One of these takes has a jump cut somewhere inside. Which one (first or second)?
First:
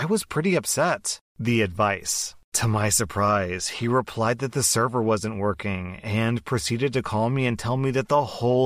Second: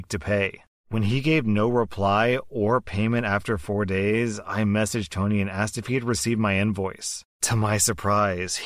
first